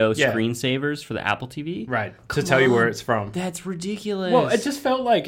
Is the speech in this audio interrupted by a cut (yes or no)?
no